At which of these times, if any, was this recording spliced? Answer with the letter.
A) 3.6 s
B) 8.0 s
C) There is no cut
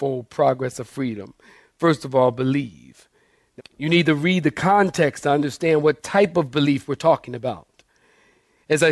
A